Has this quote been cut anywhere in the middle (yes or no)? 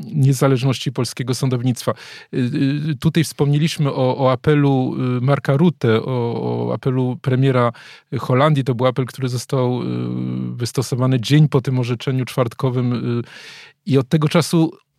no